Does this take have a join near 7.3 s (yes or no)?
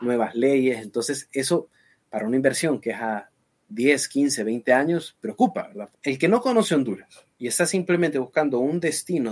yes